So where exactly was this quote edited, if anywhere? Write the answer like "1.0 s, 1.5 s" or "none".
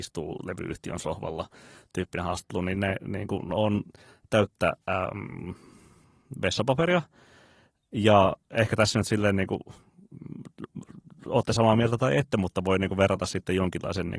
4.8 s